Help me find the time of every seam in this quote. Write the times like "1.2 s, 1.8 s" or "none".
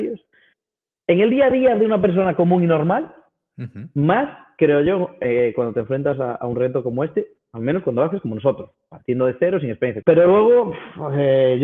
10.0 s